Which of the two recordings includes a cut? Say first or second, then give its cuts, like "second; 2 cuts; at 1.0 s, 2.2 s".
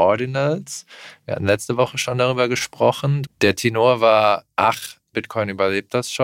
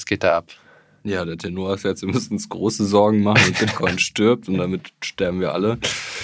first; 2 cuts; at 3.2 s, 5.1 s